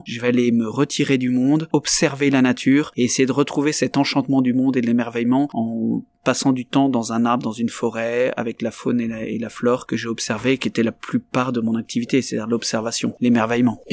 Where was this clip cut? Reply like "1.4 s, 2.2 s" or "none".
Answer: none

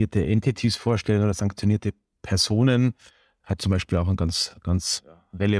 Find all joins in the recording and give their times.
none

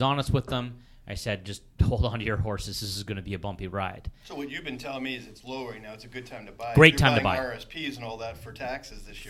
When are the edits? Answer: none

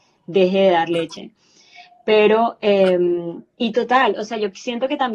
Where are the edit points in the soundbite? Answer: none

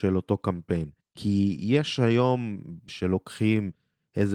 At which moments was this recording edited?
1.0 s, 2.9 s

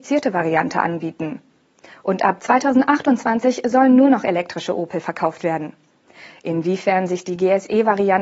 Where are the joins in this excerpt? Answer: none

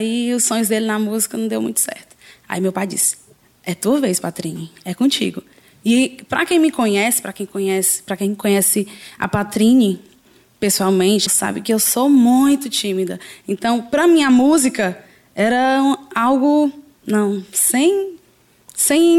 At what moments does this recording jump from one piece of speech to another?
11.3 s

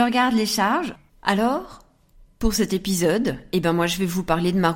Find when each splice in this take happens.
1.1 s

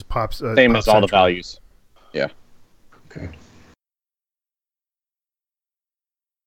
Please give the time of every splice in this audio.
none

